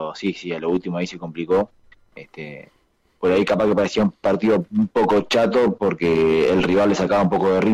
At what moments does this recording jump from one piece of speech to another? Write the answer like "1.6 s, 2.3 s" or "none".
2.1 s